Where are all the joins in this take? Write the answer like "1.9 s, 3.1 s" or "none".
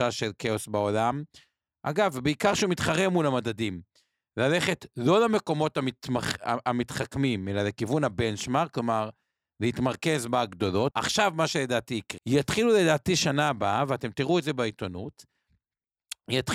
10.9 s, 12.2 s